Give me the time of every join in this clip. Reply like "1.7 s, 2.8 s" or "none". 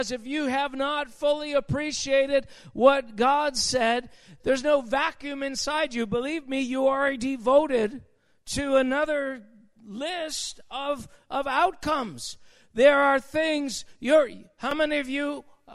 4.4 s